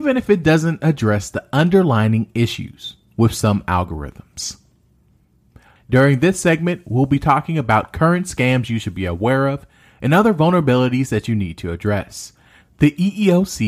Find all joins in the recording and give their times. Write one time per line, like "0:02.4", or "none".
0:05.8
0:12.6